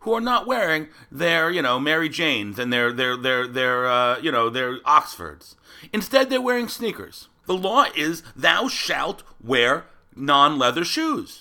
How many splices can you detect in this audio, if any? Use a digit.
1